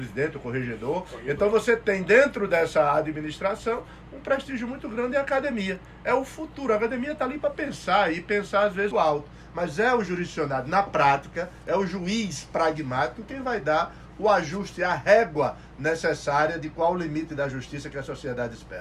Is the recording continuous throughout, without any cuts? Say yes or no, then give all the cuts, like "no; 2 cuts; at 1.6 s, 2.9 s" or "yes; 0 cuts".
no; 1 cut; at 8.9 s